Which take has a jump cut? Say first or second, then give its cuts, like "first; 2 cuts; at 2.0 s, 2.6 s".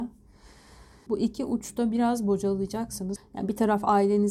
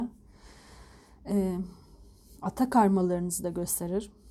first; 2 cuts; at 1.1 s, 3.2 s